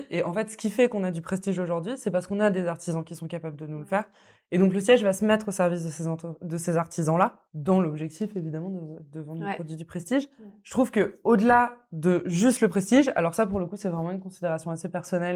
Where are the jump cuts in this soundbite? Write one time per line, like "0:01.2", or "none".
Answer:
none